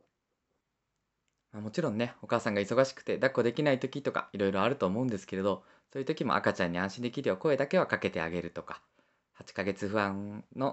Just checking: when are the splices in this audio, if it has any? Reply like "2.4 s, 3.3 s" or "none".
none